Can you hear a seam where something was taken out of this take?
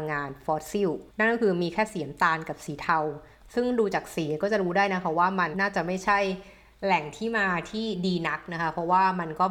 yes; 2 cuts; at 1.1 s, 5.5 s

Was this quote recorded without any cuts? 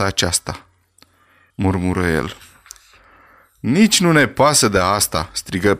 no; 1 cut; at 1.5 s

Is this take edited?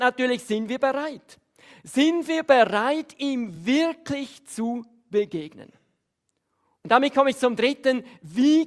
no; 0 cuts

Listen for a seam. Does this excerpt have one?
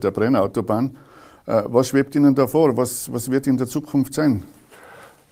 no; 0 cuts

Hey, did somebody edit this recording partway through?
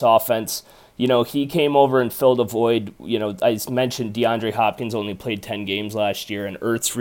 no; 0 cuts

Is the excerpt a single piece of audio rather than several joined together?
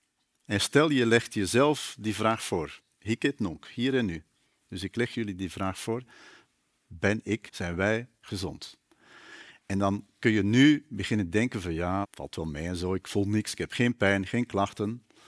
no; 2 cuts; at 7.5 s, 12.0 s

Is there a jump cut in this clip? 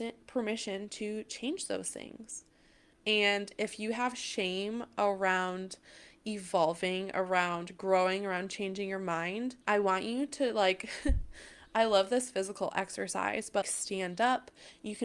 yes; 3 cuts; at 2.9 s, 9.6 s, 13.6 s

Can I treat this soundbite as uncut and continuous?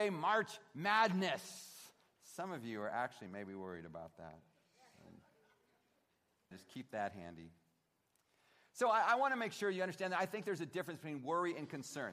no; 1 cut; at 6.5 s

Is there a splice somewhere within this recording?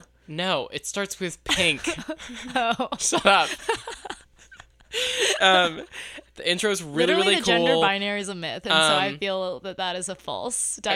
yes; 1 cut; at 6.3 s

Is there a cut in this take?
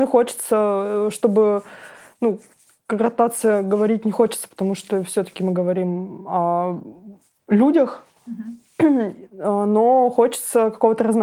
no; 0 cuts

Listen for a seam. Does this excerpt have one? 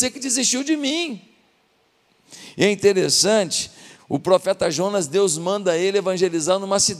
yes; 1 cut; at 4.0 s

